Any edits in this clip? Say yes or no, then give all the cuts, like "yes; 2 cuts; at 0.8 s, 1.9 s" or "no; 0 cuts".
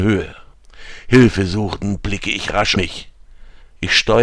yes; 1 cut; at 2.8 s